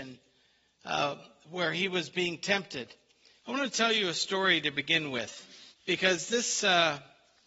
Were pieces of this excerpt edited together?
yes; 2 cuts; at 3.4 s, 5.7 s

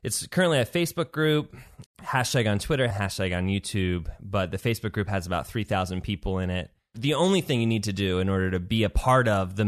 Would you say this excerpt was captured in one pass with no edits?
no; 2 cuts; at 1.9 s, 2.9 s

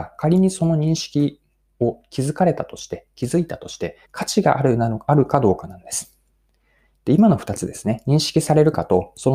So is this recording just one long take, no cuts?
no; 1 cut; at 4.0 s

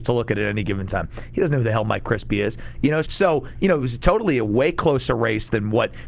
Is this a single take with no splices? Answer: no; 1 cut; at 3.0 s

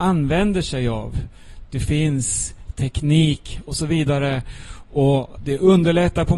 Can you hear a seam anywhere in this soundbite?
no; 0 cuts

